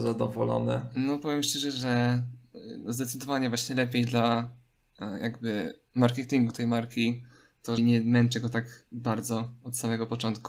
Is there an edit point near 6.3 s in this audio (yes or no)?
no